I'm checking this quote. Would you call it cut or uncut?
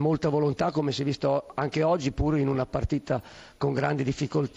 uncut